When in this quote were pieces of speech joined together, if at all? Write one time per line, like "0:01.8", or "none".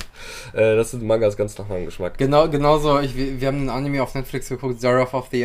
none

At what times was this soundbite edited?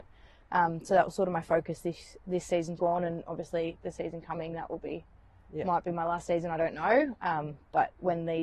0:02.8

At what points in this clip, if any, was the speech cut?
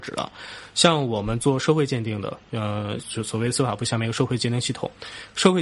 0:03.0

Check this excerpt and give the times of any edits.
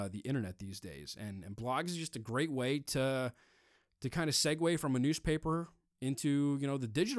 none

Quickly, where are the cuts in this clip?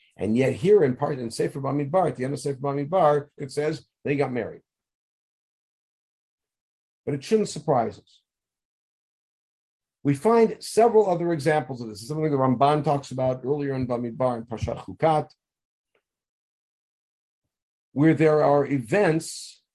0:03.4

